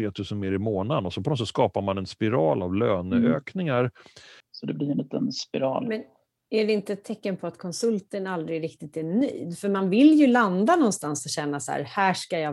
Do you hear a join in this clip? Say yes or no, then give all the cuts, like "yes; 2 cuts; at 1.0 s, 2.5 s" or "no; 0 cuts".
yes; 1 cut; at 4.4 s